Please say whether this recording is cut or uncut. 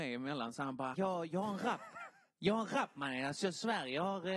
cut